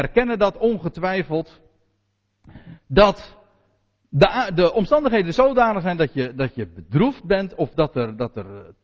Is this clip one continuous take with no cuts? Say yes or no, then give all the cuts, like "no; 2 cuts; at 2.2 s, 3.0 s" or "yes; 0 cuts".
yes; 0 cuts